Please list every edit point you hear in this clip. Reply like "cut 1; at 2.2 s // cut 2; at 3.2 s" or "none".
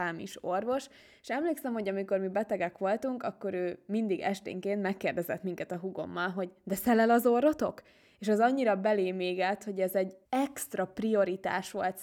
cut 1; at 10.2 s